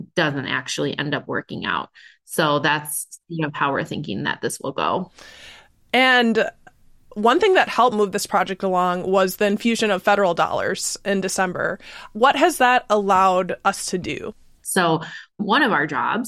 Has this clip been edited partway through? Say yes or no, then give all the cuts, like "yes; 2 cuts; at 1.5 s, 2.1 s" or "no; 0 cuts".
yes; 1 cut; at 14.6 s